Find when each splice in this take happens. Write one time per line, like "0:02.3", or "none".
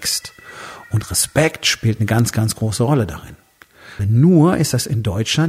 0:04.0